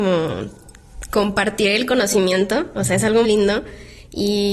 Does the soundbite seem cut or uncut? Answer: cut